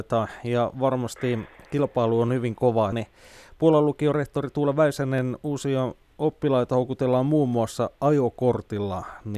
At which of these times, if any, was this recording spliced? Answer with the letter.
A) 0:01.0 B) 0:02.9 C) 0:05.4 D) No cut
B